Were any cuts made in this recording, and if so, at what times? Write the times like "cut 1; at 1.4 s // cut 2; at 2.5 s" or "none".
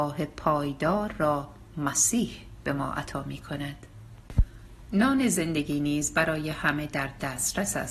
none

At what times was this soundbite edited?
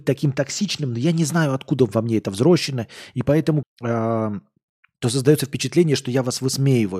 cut 1; at 3.6 s

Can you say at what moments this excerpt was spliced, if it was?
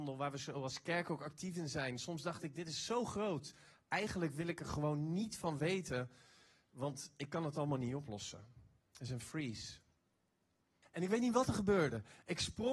cut 1; at 10.8 s

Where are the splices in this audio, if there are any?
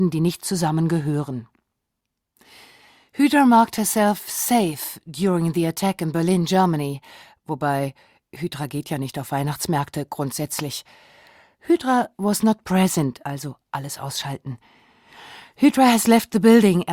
cut 1; at 13.2 s

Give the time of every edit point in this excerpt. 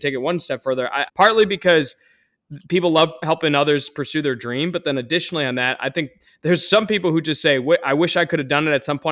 cut 1; at 1.1 s

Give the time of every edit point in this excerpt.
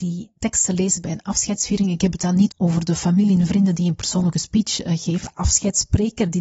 cut 1; at 2.5 s // cut 2; at 5.2 s

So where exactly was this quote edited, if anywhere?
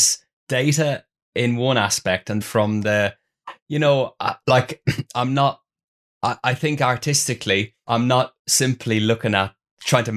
cut 1; at 2.4 s

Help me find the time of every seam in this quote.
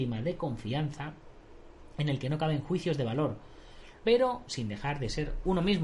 cut 1; at 4.0 s

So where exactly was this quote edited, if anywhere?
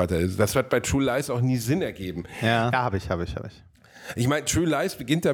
cut 1; at 2.7 s

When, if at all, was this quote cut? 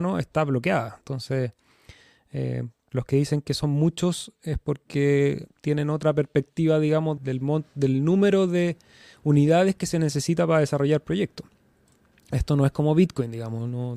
cut 1; at 7.2 s

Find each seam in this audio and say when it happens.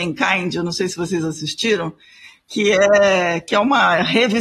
none

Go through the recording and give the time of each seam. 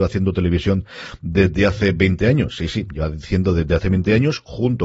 none

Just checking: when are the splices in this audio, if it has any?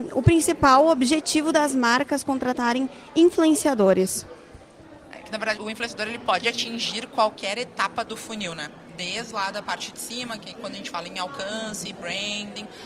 cut 1; at 5.6 s

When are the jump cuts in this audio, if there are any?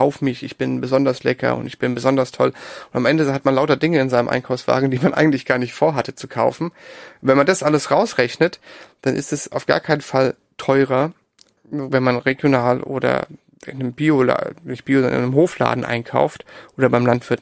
cut 1; at 11.6 s

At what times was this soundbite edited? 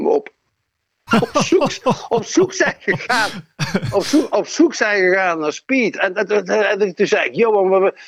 cut 1; at 1.1 s

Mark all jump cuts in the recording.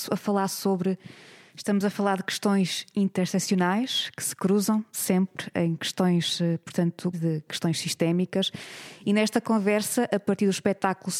cut 1; at 1.5 s // cut 2; at 7.1 s

